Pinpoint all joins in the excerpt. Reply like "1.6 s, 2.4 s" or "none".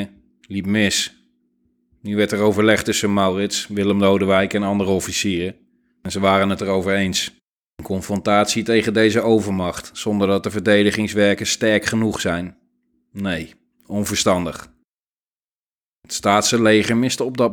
none